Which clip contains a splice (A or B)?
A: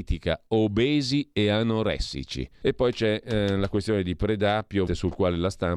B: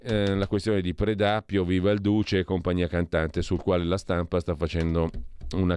A